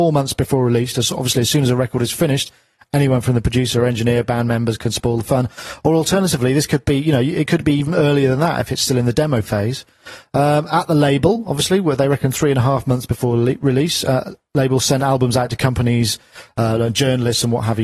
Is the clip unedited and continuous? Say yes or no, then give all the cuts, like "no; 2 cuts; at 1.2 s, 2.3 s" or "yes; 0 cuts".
yes; 0 cuts